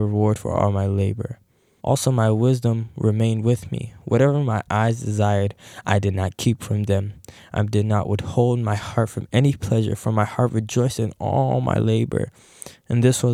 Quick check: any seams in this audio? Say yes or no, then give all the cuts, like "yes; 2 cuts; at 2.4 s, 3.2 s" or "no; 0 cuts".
yes; 1 cut; at 1.8 s